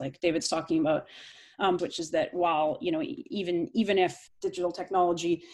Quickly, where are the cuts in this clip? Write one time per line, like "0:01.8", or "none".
0:01.8